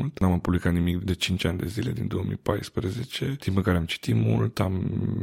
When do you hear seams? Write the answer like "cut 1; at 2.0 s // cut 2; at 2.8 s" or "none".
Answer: cut 1; at 1.0 s